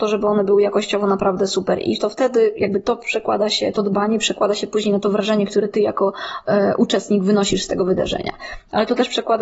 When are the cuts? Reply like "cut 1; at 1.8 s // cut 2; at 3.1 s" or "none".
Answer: none